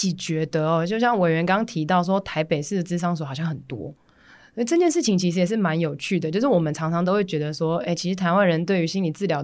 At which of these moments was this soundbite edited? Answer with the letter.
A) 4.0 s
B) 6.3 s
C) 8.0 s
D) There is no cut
D